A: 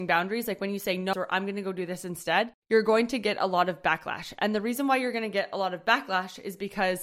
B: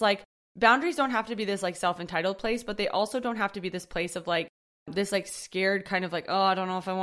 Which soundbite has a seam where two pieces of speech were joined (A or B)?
A